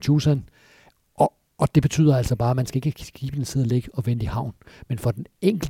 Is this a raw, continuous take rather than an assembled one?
yes; 0 cuts

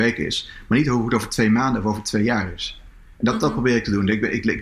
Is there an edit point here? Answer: no; 0 cuts

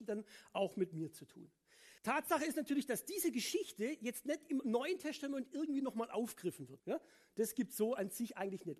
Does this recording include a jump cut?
yes; 2 cuts; at 2.0 s, 6.8 s

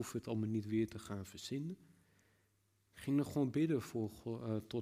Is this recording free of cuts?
yes; 0 cuts

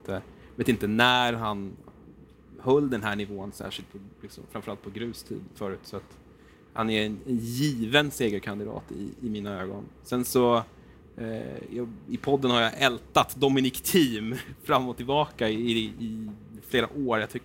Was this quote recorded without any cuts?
yes; 0 cuts

